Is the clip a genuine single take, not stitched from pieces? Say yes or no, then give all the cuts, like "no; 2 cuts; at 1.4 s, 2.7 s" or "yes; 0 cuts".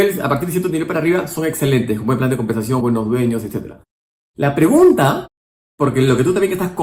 no; 1 cut; at 2.8 s